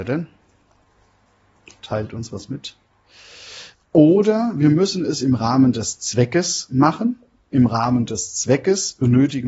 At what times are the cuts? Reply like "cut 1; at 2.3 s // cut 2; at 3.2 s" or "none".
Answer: cut 1; at 3.7 s